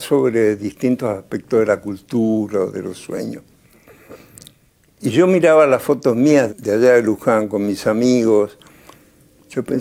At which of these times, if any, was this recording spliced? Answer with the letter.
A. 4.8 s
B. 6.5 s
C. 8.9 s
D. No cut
B